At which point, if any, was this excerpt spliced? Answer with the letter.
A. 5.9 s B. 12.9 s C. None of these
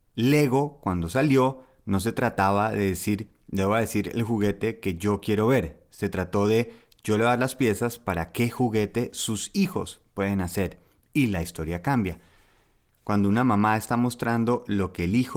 B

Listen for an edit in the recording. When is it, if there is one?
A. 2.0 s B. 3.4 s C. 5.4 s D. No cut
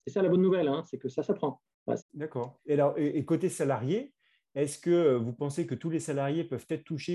A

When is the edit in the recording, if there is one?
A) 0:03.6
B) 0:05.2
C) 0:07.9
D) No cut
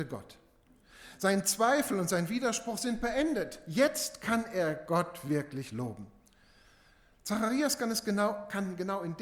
D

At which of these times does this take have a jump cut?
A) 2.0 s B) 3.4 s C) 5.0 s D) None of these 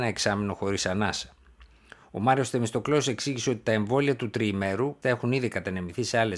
C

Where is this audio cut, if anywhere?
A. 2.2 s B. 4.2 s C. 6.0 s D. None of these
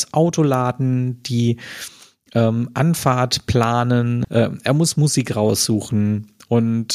B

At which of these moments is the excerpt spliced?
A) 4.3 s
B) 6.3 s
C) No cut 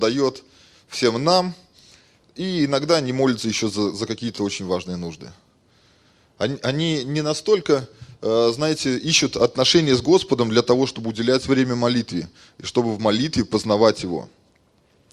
C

